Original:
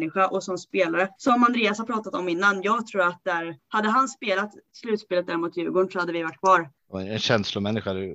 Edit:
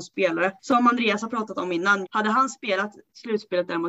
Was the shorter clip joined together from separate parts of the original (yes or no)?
yes